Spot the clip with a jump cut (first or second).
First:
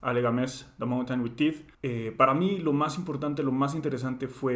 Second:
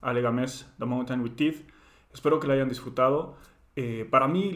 first